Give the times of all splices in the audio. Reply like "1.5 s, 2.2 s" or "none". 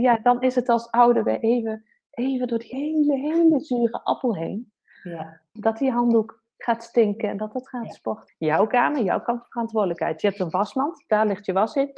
2.7 s, 5.6 s, 8.3 s